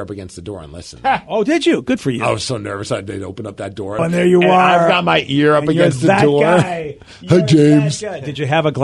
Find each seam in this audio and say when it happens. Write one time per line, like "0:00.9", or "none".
0:04.0